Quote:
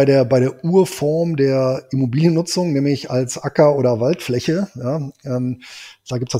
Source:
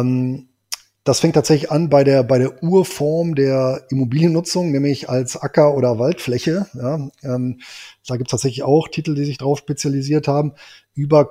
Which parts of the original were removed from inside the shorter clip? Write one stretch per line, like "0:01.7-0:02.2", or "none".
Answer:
none